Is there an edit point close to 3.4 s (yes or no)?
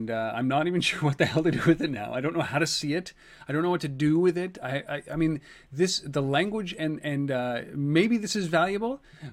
no